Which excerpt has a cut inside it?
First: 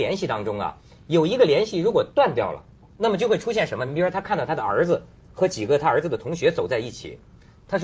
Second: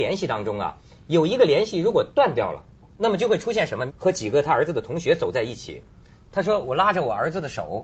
second; 1 cut; at 3.9 s

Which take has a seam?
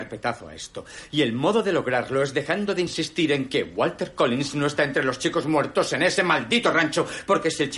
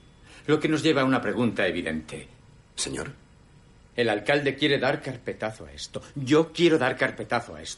second; 1 cut; at 2.5 s

